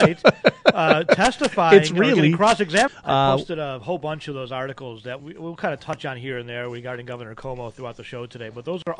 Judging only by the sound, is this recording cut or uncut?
cut